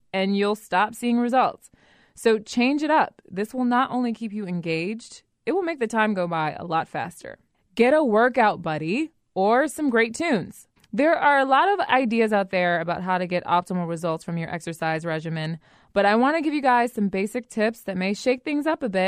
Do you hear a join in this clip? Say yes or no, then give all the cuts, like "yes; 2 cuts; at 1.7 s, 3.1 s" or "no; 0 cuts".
yes; 3 cuts; at 3.2 s, 7.6 s, 10.8 s